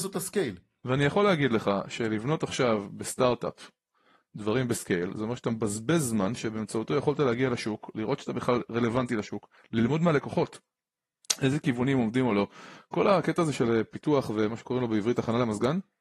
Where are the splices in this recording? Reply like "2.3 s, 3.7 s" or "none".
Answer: none